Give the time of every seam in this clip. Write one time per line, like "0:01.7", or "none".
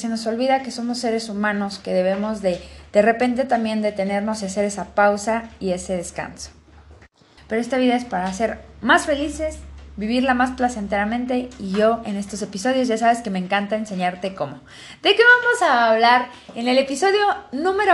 0:07.4

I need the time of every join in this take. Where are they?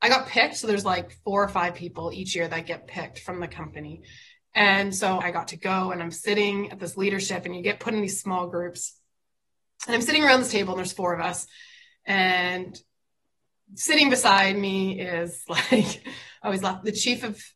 0:05.2

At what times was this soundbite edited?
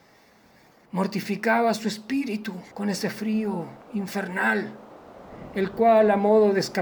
0:02.7

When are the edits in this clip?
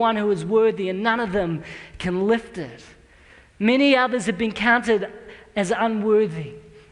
none

